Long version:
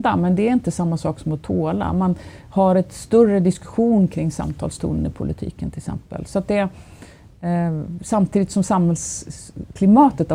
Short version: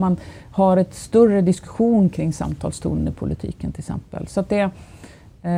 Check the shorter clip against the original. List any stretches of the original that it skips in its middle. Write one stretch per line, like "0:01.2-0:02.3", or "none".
none